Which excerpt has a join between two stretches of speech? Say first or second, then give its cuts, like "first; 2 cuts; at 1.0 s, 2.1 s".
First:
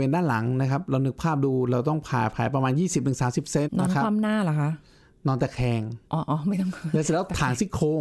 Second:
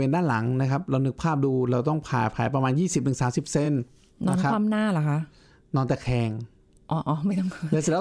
first; 2 cuts; at 3.6 s, 6.1 s